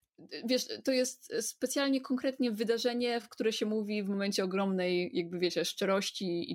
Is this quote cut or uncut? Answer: uncut